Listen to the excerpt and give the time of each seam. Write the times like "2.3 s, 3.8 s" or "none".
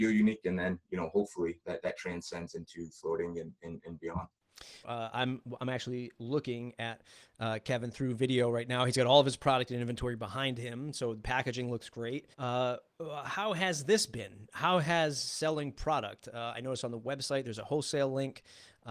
4.8 s, 12.3 s